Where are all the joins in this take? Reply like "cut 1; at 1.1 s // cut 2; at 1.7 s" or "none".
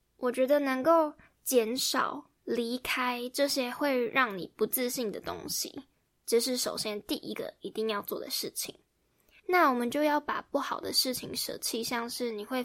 cut 1; at 9.4 s